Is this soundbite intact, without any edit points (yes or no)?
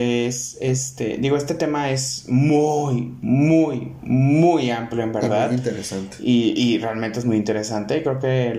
yes